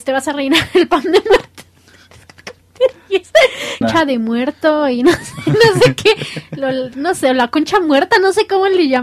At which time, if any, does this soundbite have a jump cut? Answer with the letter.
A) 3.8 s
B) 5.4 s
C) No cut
A